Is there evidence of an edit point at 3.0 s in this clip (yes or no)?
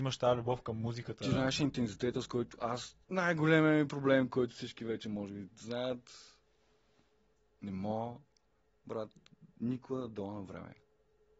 yes